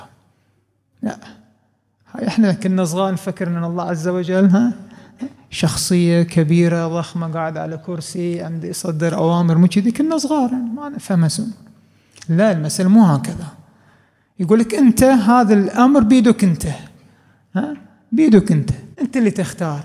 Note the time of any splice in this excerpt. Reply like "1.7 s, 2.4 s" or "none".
18.9 s